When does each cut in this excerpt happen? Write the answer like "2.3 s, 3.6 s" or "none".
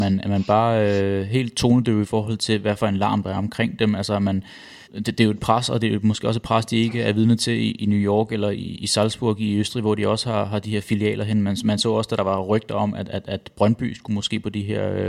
4.8 s